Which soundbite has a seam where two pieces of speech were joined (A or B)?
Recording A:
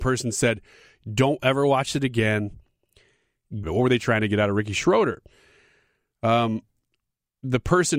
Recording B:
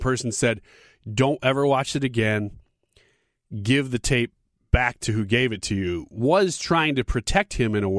A